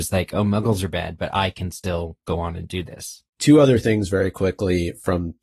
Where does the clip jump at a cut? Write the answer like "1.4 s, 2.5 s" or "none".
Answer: 3.3 s